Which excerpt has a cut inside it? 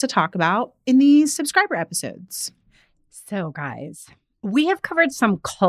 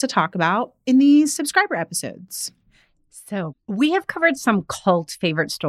second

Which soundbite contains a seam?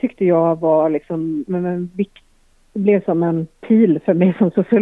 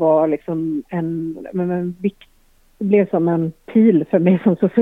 first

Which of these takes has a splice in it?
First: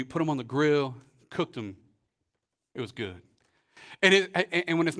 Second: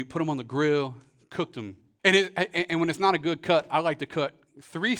second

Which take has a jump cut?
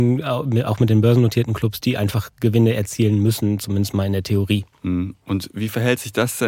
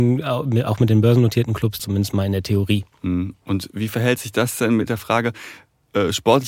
second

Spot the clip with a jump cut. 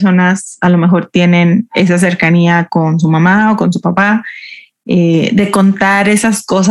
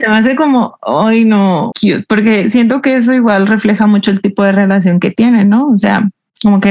second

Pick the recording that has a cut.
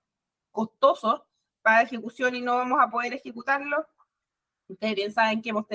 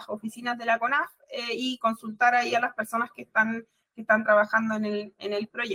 second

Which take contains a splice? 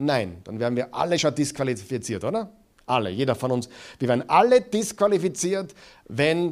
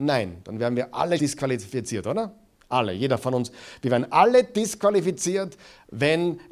second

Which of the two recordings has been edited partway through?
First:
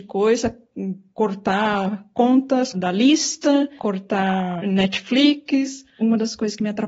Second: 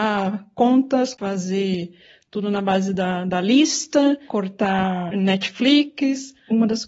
first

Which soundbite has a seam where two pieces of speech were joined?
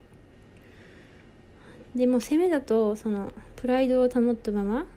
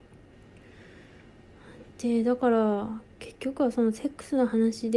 first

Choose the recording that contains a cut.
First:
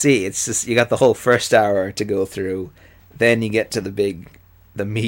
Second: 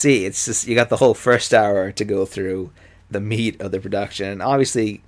second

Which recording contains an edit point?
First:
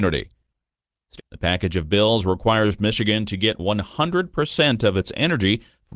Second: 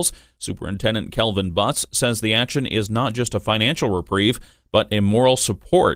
first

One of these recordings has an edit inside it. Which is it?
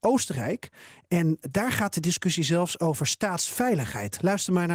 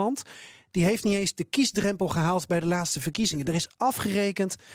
first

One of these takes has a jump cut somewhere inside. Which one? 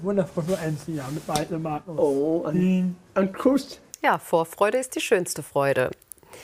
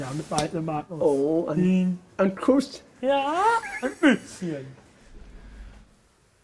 first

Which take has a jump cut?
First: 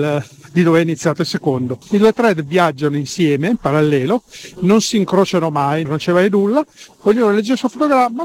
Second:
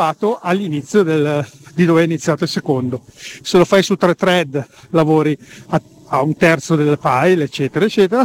first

